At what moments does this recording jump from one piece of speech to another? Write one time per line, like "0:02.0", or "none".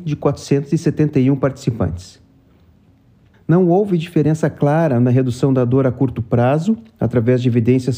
0:03.3